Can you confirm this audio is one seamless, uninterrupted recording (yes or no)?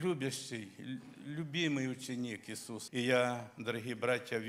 no